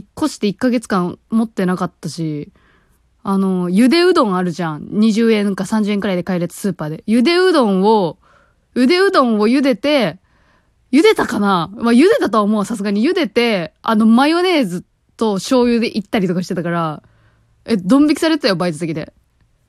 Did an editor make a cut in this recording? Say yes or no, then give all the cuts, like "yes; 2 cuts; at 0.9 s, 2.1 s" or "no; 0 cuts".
no; 0 cuts